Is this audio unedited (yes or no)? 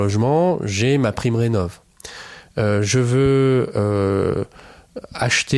yes